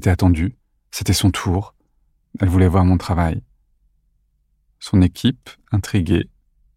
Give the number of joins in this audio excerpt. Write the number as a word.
one